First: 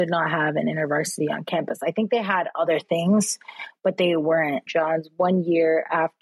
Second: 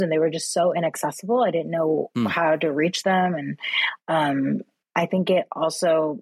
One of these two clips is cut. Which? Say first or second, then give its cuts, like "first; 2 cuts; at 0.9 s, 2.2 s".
first; 1 cut; at 4.7 s